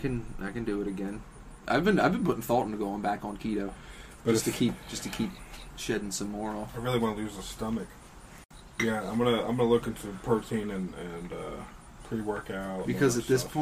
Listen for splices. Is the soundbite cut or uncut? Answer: uncut